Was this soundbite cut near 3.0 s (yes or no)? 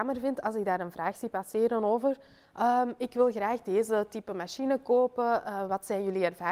no